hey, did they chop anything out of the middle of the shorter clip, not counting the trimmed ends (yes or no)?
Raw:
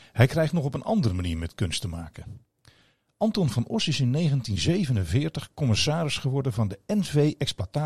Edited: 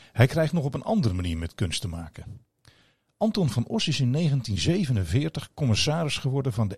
no